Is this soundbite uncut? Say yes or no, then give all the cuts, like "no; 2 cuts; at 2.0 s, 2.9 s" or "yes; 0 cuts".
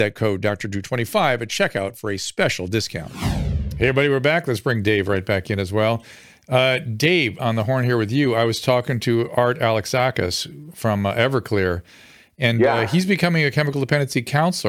no; 1 cut; at 7.4 s